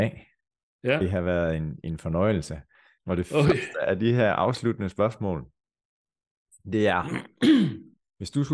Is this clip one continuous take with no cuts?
no; 1 cut; at 3.0 s

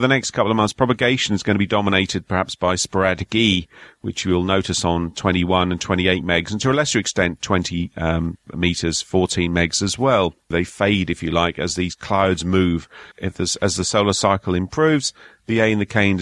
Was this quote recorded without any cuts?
no; 2 cuts; at 10.5 s, 13.1 s

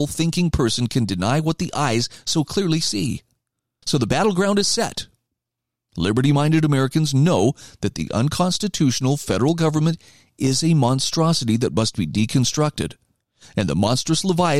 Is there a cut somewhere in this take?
yes; 1 cut; at 3.8 s

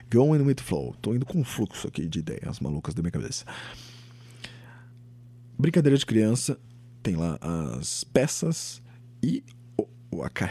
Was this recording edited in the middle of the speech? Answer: no; 0 cuts

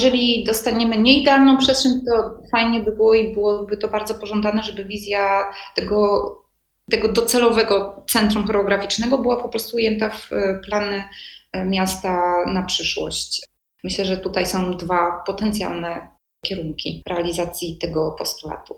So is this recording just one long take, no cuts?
yes; 0 cuts

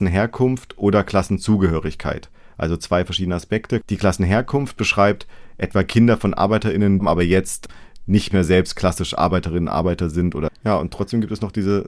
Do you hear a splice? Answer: yes; 2 cuts; at 7.0 s, 10.5 s

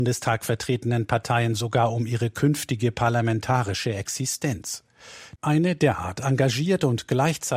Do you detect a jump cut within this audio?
yes; 1 cut; at 5.4 s

